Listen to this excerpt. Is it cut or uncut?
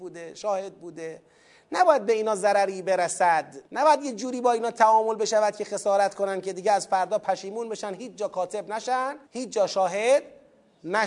cut